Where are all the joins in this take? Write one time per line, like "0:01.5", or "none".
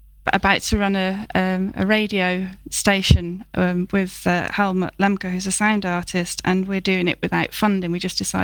none